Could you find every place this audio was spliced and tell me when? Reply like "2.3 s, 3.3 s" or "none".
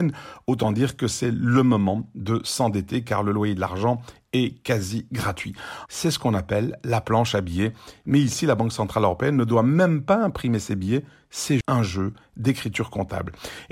5.9 s, 11.6 s